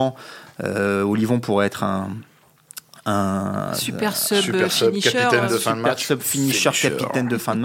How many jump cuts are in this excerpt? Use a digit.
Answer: 0